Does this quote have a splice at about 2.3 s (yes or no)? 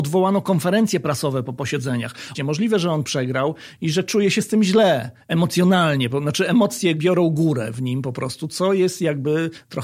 yes